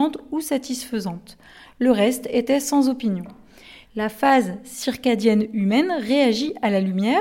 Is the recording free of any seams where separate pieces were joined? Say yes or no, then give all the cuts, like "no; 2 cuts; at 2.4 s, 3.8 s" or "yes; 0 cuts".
no; 1 cut; at 3.8 s